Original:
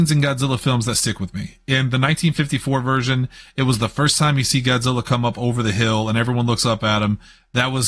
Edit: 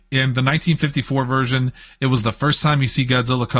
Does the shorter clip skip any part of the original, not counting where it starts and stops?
no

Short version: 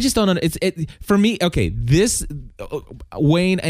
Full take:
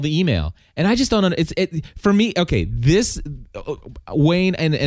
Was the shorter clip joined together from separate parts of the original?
no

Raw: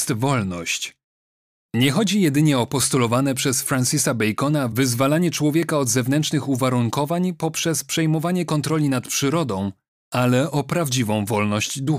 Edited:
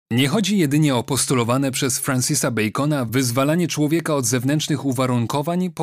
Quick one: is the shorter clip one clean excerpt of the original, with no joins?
yes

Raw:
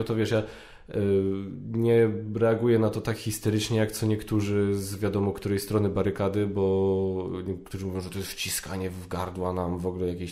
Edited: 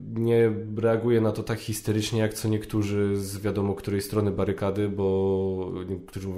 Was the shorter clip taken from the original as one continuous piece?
yes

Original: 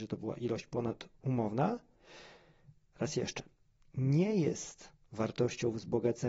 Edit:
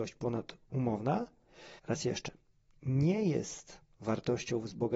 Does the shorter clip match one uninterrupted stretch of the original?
no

